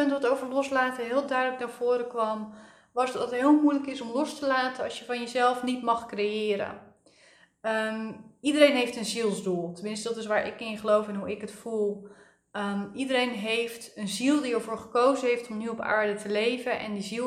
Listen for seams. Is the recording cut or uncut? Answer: uncut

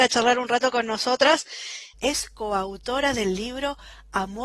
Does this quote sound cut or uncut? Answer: cut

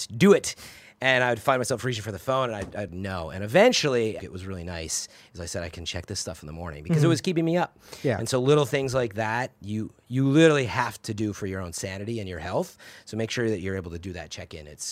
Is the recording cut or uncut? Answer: cut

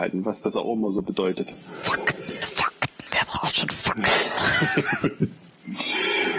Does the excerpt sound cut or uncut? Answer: uncut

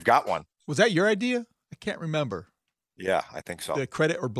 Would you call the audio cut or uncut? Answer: uncut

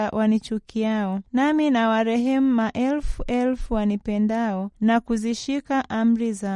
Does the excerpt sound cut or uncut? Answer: uncut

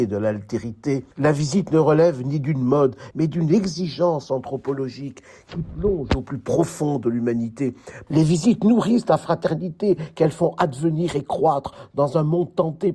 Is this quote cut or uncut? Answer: cut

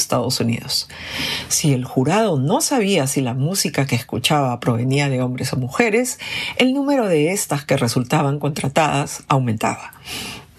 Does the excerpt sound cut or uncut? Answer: uncut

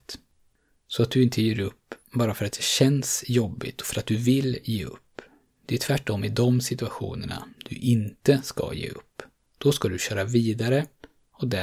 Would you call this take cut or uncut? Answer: uncut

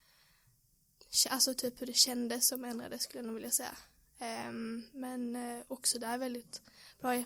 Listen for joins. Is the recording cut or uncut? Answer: uncut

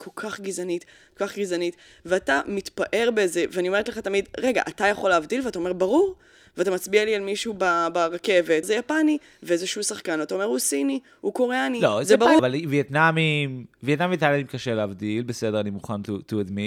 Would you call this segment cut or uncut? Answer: cut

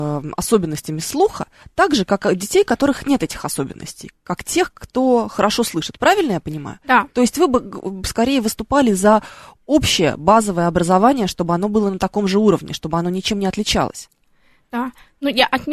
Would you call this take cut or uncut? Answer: uncut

